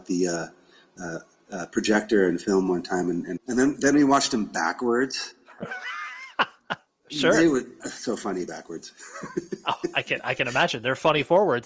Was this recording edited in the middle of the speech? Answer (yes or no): yes